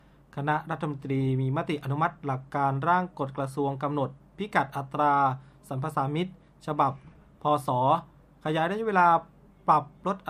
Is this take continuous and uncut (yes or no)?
yes